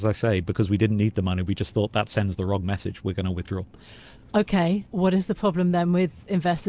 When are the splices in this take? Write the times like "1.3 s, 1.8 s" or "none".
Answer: 4.9 s